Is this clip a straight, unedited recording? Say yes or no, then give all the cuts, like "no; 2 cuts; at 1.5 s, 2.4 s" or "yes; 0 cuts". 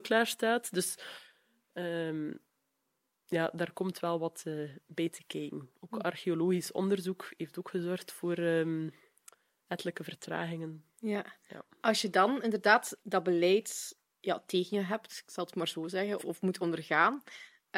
no; 2 cuts; at 13.0 s, 16.2 s